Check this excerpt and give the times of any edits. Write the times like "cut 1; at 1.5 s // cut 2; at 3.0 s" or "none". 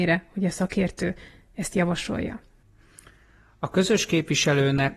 none